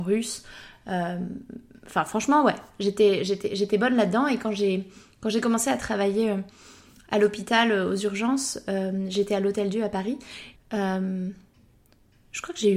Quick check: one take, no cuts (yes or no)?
no